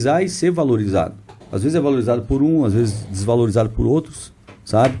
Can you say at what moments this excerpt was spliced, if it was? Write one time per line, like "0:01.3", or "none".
0:01.4